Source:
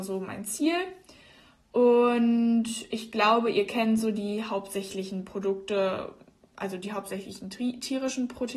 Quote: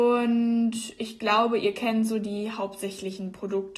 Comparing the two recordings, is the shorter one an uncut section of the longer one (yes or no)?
yes